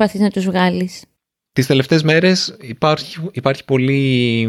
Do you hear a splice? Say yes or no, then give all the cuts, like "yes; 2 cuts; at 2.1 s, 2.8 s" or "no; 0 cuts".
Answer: no; 0 cuts